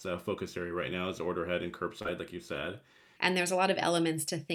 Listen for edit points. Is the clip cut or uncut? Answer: cut